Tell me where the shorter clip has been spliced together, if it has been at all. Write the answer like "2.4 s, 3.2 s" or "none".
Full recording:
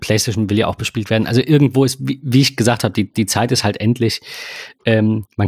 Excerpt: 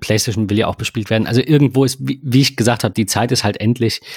2.9 s

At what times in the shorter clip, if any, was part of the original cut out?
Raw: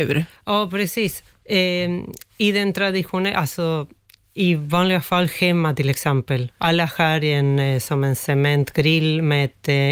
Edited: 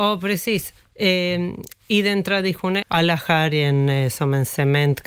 2.8 s

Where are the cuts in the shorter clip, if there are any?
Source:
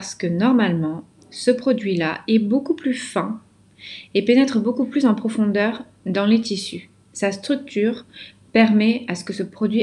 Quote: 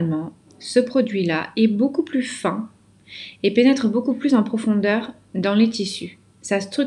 none

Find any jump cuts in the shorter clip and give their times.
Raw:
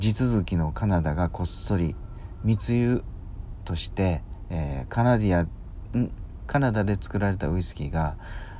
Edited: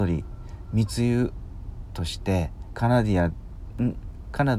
2.7 s

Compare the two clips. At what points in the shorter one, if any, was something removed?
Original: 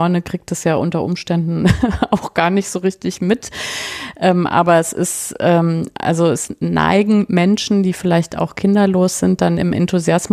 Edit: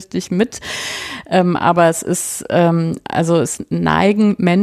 none

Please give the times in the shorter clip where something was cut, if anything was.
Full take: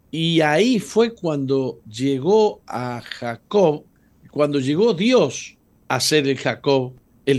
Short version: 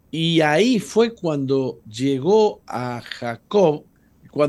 none

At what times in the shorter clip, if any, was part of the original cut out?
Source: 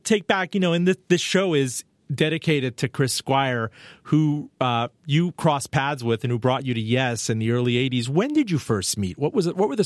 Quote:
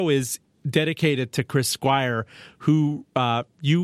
none

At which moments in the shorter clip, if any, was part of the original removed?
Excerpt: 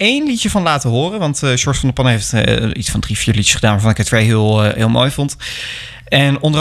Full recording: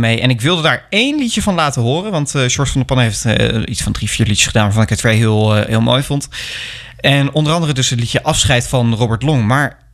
none

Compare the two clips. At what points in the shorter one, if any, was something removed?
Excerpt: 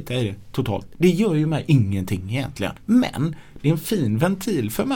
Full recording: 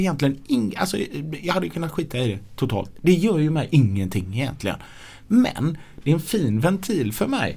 2.8 s

